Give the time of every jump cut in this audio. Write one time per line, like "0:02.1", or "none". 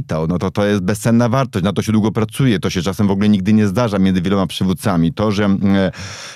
none